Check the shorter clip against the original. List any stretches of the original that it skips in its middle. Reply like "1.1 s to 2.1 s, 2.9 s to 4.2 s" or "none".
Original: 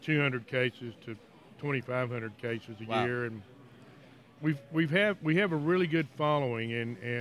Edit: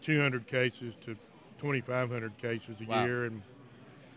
none

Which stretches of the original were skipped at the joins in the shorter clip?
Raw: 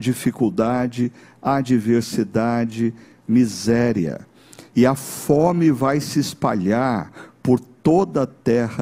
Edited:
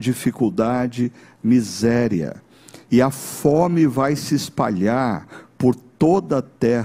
1.3 s to 3.2 s

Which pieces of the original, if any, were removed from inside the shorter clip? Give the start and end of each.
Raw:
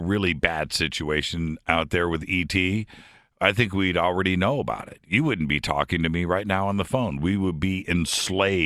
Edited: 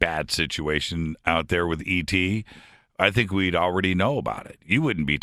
none

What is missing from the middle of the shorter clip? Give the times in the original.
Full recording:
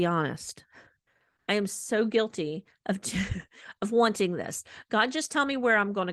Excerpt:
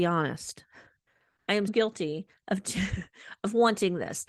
1.7 s to 2.1 s

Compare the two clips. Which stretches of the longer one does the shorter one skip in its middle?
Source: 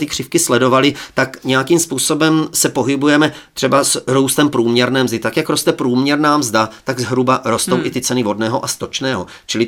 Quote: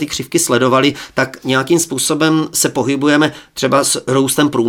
none

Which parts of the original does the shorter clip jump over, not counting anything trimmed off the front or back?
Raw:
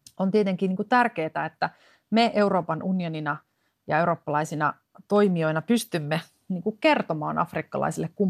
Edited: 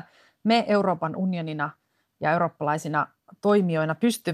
none

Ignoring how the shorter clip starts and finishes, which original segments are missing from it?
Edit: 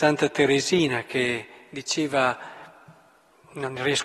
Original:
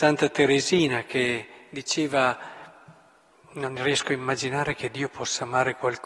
none

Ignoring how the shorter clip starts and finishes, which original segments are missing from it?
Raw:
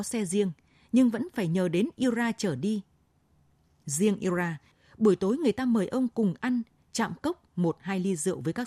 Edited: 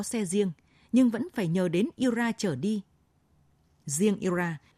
none

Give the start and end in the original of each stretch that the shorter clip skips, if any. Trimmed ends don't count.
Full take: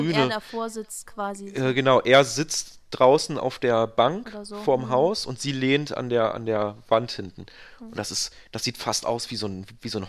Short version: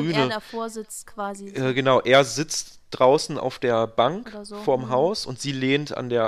none

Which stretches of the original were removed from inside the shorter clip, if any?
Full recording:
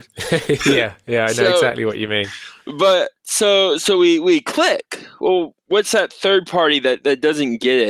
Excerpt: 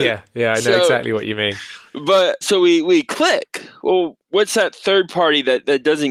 3.1 s to 3.8 s

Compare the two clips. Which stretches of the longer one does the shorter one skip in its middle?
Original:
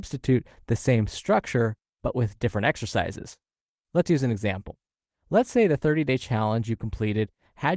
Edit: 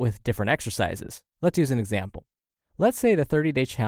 3.5 s to 3.8 s

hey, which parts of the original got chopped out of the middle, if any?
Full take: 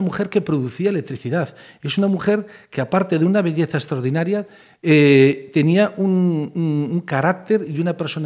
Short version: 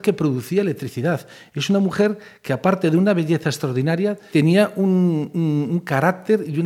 4.6 s to 5.5 s

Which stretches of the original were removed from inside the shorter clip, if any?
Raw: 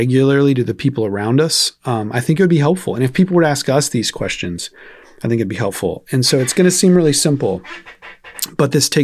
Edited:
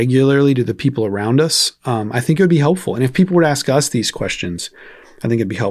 none

